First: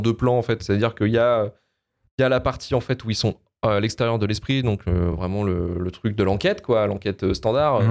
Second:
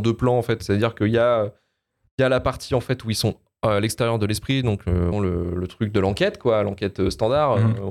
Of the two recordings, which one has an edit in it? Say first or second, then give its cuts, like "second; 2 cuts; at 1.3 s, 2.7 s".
second; 1 cut; at 5.1 s